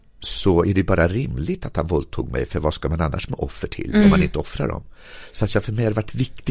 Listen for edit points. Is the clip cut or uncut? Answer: uncut